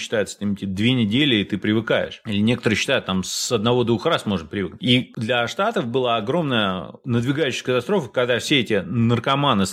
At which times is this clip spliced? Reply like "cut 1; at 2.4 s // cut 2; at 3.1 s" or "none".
none